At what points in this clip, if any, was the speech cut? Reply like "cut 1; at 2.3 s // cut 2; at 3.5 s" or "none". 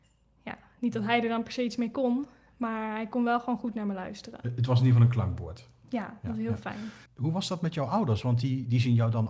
none